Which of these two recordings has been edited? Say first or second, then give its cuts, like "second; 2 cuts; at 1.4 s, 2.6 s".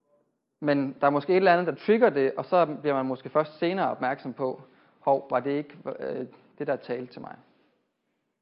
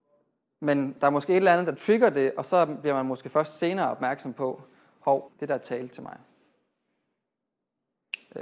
second; 1 cut; at 5.3 s